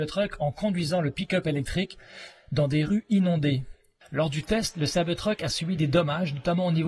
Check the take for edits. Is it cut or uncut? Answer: cut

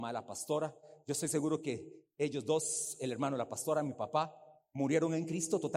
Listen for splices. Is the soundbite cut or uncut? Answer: uncut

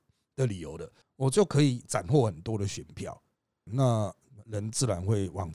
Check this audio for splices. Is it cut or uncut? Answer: cut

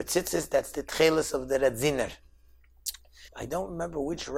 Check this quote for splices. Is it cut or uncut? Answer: cut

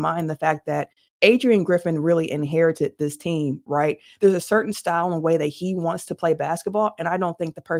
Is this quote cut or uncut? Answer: uncut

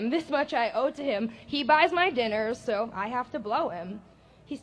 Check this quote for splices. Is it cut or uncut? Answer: uncut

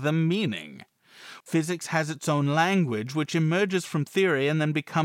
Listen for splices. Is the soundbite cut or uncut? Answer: cut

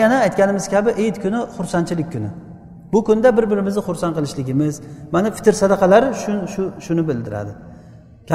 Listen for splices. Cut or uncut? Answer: uncut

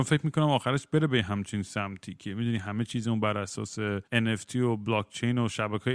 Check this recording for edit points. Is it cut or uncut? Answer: cut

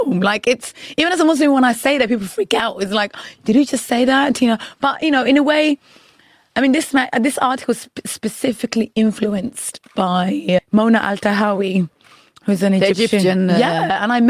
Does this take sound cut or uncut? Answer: cut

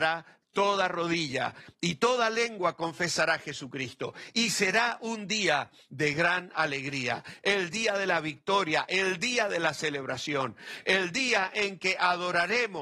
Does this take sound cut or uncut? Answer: uncut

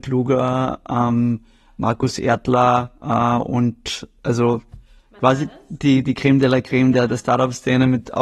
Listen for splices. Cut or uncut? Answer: uncut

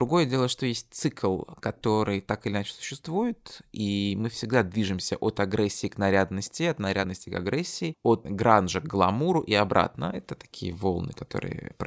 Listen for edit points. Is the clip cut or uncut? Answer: uncut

